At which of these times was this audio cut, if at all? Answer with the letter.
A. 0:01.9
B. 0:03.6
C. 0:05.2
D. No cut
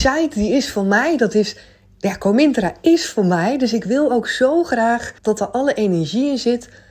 C